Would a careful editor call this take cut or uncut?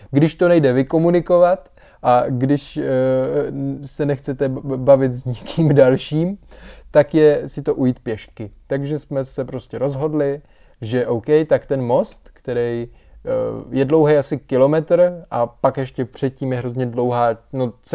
uncut